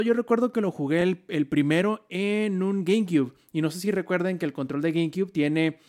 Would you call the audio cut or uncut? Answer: uncut